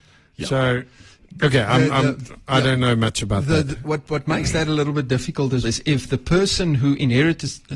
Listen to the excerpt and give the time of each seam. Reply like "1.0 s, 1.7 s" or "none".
5.6 s